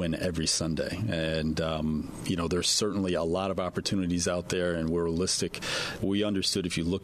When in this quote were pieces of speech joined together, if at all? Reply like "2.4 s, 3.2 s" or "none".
6.0 s